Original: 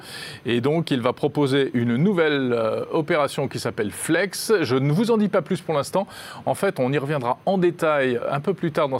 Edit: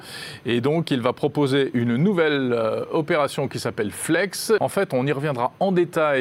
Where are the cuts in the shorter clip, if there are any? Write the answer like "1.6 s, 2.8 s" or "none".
4.6 s